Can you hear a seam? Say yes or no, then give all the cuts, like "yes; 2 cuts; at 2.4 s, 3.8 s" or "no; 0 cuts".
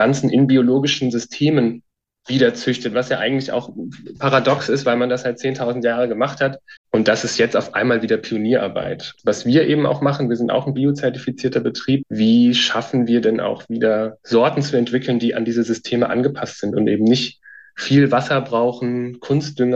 yes; 2 cuts; at 6.8 s, 12.0 s